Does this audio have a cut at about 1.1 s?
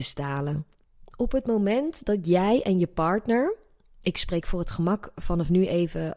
no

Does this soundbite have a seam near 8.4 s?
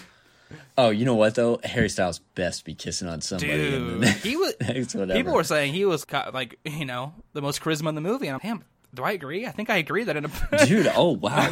yes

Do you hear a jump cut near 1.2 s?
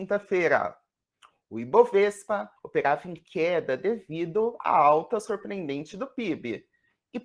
no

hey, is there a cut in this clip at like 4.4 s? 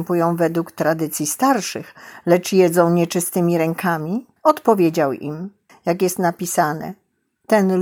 yes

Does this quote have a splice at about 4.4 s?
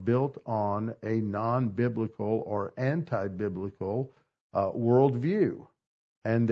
no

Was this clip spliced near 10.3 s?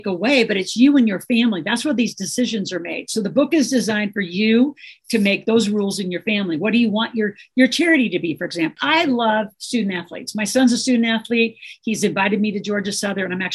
no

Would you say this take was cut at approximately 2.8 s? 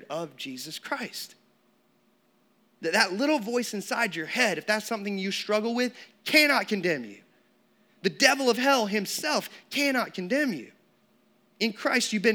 yes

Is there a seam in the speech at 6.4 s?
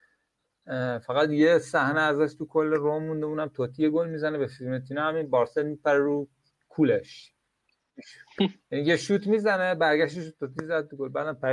no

